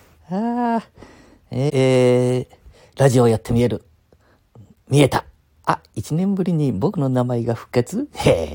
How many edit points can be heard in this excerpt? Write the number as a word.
one